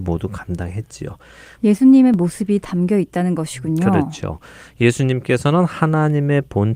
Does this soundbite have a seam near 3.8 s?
no; 1 cut; at 1.6 s

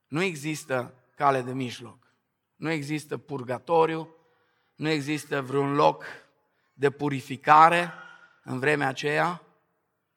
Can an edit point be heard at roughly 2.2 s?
no; 0 cuts

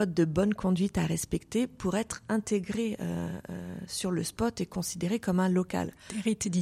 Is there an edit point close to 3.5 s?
no; 0 cuts

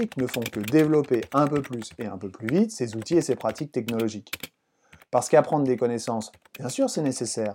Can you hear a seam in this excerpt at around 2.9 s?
no; 1 cut; at 5.0 s

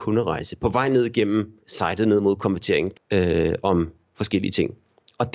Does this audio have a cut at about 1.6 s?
yes; 2 cuts; at 1.6 s, 2.9 s

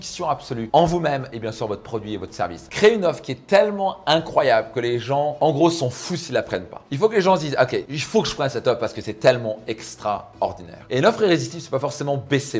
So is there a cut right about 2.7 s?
yes; 1 cut; at 2.7 s

